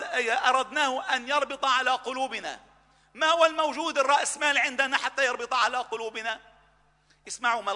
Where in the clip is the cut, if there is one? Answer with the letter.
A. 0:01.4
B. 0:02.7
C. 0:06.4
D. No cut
D